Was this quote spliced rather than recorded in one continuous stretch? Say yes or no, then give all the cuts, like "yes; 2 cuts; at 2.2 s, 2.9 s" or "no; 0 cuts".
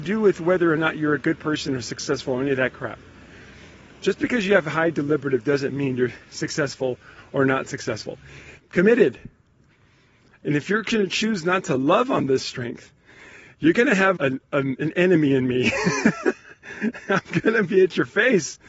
yes; 2 cuts; at 8.6 s, 14.2 s